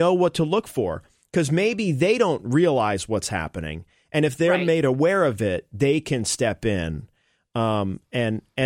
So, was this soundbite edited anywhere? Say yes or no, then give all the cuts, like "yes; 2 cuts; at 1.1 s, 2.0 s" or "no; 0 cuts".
no; 0 cuts